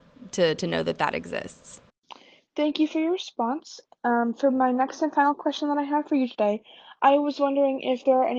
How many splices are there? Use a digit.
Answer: 0